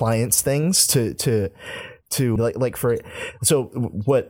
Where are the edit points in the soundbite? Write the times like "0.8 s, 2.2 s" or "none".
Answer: 2.4 s